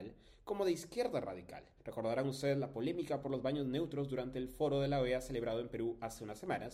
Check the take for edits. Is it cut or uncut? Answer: cut